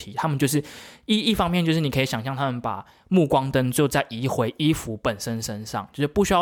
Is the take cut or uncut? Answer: uncut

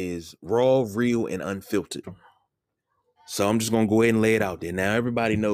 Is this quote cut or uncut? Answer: cut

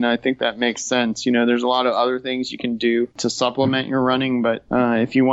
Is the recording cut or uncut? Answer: uncut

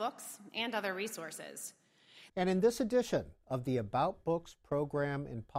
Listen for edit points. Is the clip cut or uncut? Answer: cut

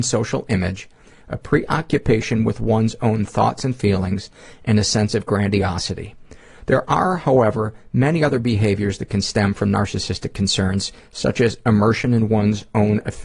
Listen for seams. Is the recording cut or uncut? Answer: uncut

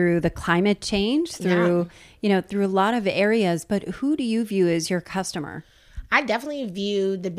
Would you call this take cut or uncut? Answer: uncut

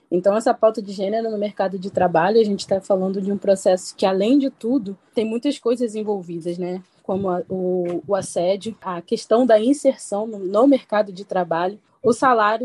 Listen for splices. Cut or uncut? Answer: uncut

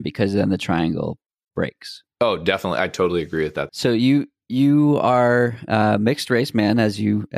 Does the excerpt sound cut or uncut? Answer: cut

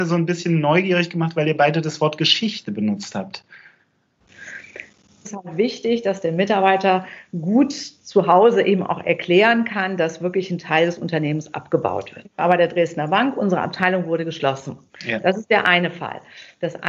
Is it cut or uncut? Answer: cut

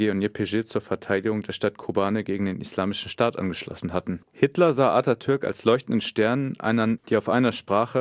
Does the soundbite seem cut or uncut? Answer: cut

